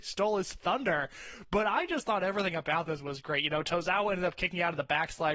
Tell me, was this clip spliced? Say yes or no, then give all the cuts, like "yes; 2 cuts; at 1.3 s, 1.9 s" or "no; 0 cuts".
no; 0 cuts